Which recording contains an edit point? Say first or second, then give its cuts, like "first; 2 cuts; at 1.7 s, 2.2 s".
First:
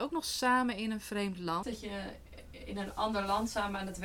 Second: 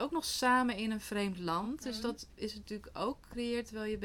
first; 1 cut; at 1.6 s